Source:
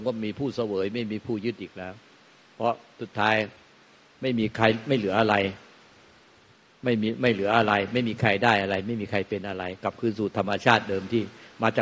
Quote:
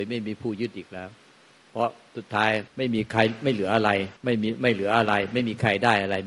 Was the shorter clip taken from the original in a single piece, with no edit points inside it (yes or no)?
no